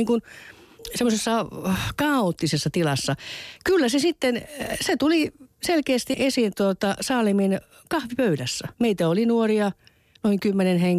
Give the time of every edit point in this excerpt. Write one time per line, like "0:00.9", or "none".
0:06.1
0:08.7